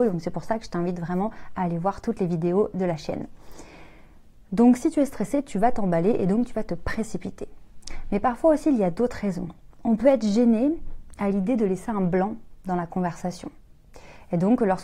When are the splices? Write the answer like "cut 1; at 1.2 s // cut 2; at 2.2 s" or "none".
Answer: none